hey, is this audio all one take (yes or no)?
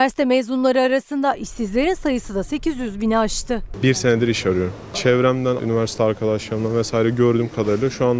no